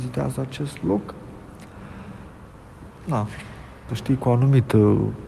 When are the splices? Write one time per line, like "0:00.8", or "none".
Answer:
0:03.9

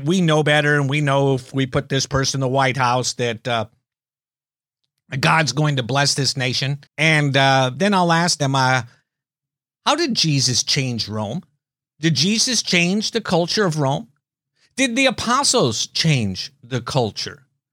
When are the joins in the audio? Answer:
0:06.9

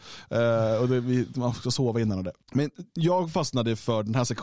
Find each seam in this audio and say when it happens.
0:02.4

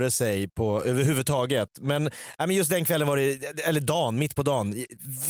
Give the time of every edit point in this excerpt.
none

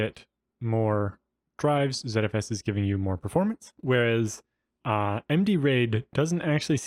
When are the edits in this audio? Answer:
none

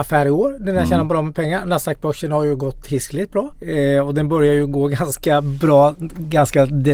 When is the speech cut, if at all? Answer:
0:03.5

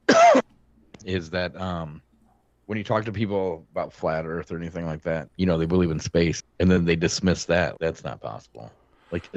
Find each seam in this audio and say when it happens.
0:05.3
0:06.4
0:07.8

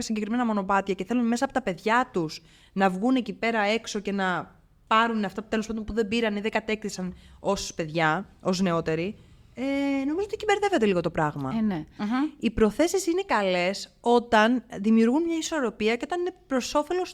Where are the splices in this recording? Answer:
0:12.0

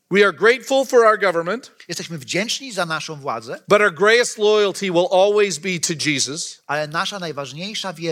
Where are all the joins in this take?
none

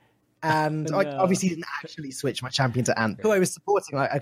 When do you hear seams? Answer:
0:03.2

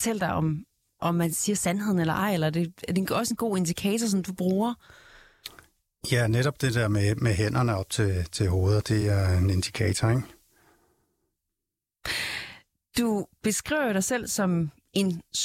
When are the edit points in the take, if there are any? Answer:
none

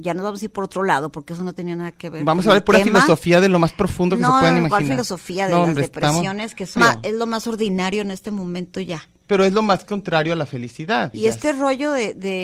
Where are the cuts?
0:06.8
0:11.1

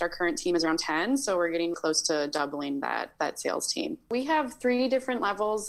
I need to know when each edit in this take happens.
0:01.7

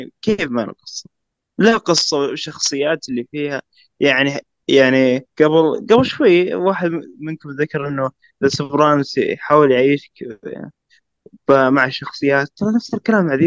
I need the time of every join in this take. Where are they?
0:05.3

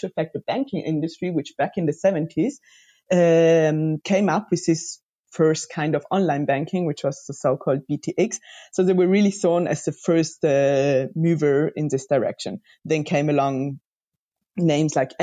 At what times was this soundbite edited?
none

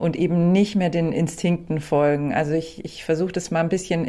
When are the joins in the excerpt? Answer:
none

